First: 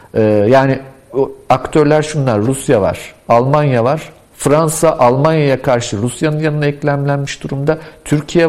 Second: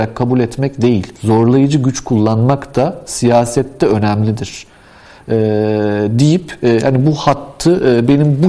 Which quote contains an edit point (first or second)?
second